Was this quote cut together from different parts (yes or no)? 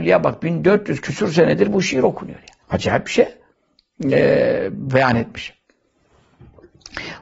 yes